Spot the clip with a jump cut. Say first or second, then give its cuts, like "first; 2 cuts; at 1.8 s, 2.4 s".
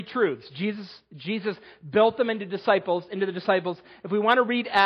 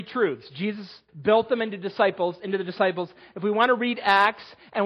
second; 1 cut; at 1.1 s